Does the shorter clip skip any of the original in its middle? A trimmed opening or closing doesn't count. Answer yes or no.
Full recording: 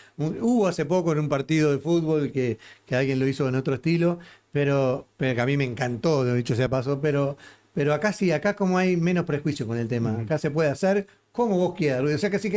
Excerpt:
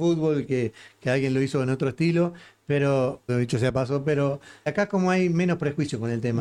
yes